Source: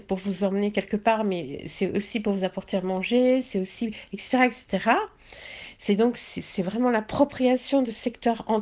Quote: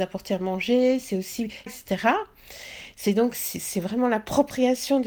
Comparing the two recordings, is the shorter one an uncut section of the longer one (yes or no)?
no